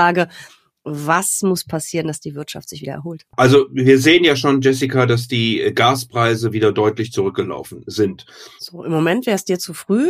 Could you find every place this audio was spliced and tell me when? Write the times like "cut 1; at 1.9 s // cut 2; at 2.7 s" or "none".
cut 1; at 8.6 s